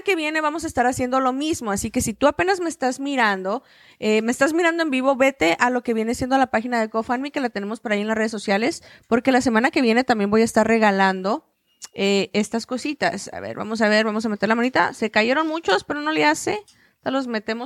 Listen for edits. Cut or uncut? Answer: uncut